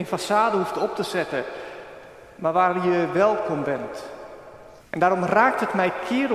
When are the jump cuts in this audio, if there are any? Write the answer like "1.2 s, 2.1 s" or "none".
4.8 s